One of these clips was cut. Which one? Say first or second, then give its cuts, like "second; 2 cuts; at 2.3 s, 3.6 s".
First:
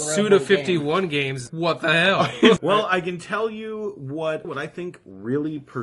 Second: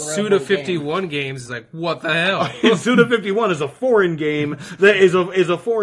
first; 3 cuts; at 1.5 s, 2.6 s, 4.4 s